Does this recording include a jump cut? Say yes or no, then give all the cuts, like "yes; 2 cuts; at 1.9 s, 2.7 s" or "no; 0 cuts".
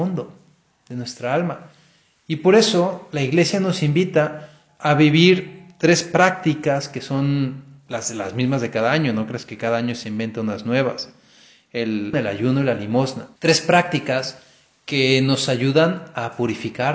yes; 2 cuts; at 12.1 s, 13.4 s